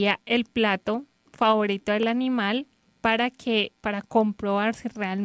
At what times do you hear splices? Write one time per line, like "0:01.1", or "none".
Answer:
0:03.8

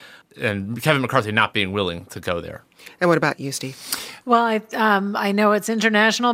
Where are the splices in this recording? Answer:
0:04.2

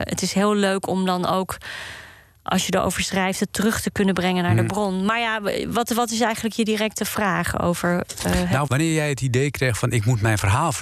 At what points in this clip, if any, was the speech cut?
0:08.7

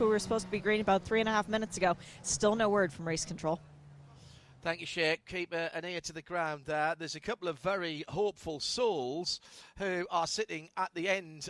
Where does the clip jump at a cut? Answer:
none

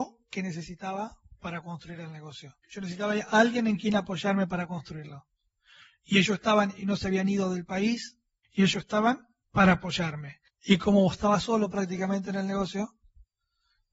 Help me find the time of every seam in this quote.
0:02.6
0:08.4
0:10.5

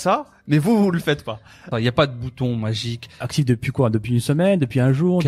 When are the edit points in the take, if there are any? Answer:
0:01.7
0:03.2

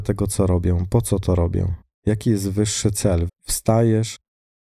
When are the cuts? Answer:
0:03.3

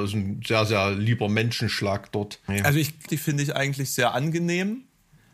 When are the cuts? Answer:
0:03.1

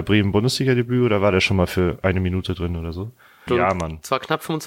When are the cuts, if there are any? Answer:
0:03.5

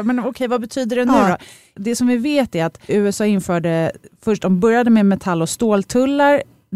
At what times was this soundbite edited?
0:02.9

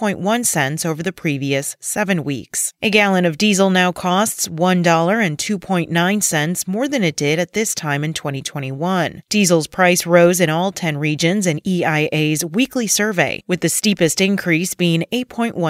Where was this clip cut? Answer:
none

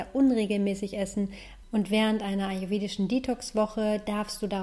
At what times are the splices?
0:01.6

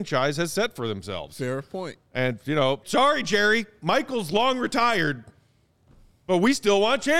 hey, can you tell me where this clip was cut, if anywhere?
0:02.8

